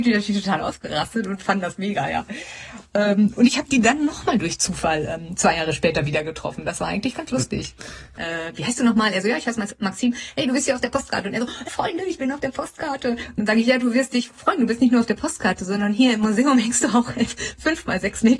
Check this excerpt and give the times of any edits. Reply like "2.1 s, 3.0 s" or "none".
8.2 s, 11.6 s